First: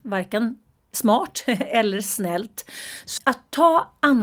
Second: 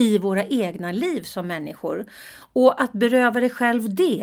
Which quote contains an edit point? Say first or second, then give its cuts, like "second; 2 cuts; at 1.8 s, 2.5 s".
first; 1 cut; at 3.2 s